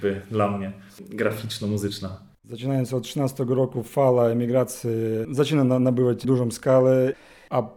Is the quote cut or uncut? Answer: cut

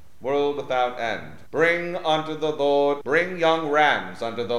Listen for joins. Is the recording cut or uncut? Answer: cut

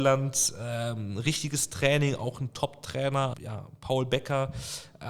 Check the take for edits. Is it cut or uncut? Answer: cut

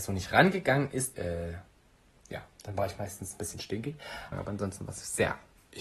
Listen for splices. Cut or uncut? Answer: cut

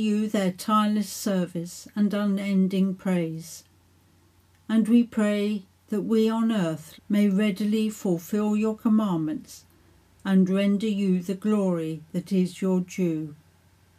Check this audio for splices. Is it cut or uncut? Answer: cut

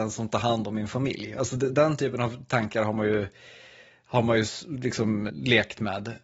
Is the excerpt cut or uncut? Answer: cut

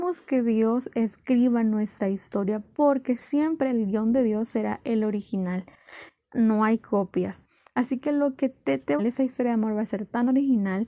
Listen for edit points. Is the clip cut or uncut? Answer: cut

